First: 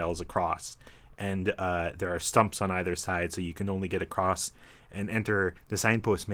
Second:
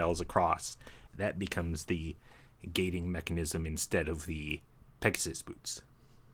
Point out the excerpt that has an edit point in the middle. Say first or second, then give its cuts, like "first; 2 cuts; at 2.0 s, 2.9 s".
second; 1 cut; at 1.1 s